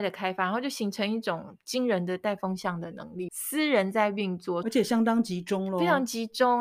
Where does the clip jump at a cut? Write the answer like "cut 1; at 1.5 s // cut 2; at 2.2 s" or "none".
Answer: cut 1; at 3.3 s // cut 2; at 4.6 s